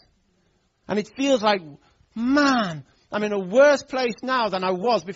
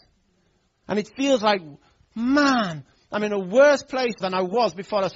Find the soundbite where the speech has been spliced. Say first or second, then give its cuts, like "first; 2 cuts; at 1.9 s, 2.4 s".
second; 1 cut; at 4.2 s